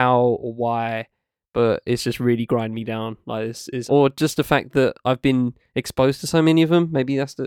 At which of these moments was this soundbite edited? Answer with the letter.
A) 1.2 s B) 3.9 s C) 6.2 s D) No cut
B